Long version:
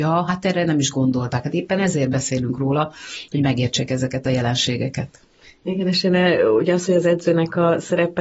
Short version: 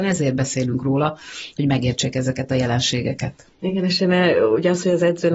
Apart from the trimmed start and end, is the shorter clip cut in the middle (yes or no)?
yes